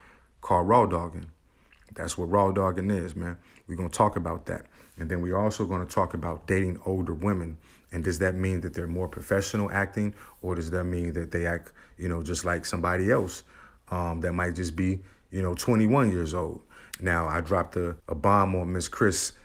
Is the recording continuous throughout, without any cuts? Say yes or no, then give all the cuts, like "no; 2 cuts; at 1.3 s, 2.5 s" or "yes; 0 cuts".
no; 2 cuts; at 16.9 s, 18.0 s